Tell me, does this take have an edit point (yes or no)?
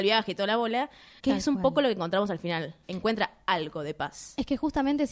yes